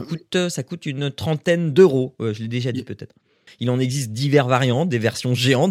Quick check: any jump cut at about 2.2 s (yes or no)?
no